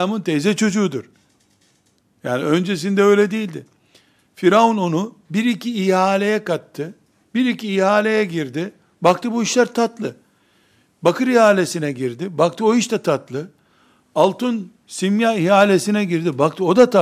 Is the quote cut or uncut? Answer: cut